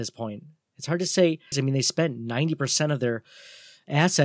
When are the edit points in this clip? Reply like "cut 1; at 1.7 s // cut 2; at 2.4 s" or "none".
cut 1; at 1.5 s

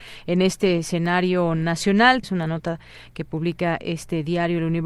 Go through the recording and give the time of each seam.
cut 1; at 2.2 s

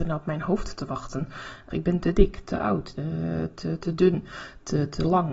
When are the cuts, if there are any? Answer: cut 1; at 1.7 s // cut 2; at 2.9 s

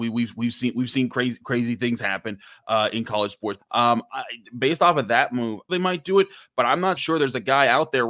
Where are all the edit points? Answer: cut 1; at 3.6 s // cut 2; at 5.7 s // cut 3; at 7.0 s

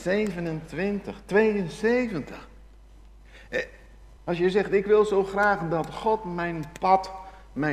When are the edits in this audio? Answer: cut 1; at 4.2 s

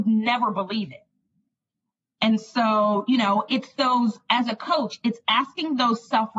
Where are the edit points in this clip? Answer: none

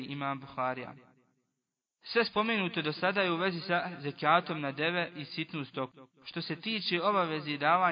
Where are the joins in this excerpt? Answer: none

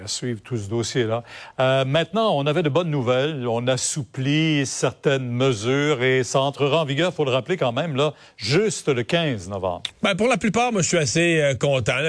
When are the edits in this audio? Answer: cut 1; at 9.9 s

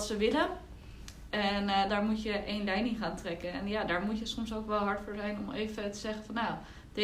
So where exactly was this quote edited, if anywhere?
cut 1; at 1.9 s

